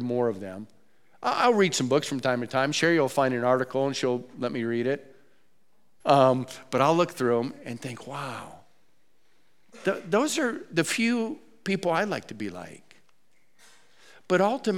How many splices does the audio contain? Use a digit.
1